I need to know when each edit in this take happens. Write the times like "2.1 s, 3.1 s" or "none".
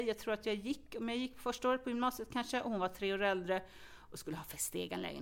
none

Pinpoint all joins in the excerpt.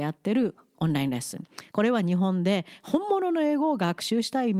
1.7 s

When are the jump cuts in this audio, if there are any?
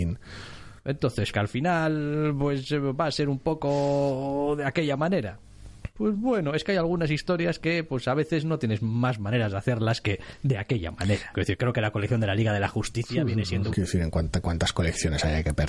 1.3 s, 11.3 s, 13.7 s

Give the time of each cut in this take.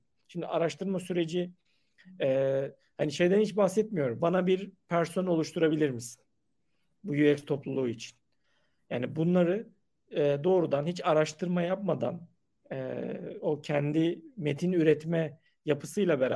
4.2 s

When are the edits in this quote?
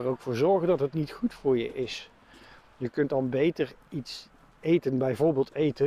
none

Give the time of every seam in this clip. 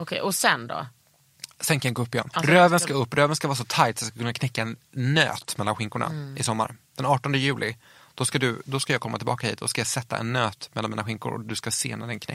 2.3 s

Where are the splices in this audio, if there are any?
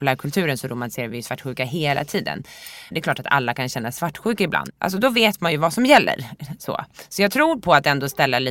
2.9 s, 4.7 s

